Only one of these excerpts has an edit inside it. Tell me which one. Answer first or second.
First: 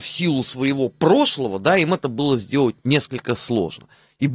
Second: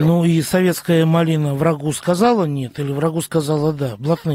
first